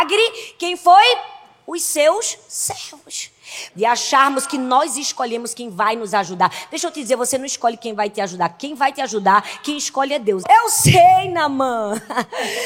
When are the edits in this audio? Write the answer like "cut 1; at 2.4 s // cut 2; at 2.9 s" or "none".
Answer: cut 1; at 3.7 s // cut 2; at 10.4 s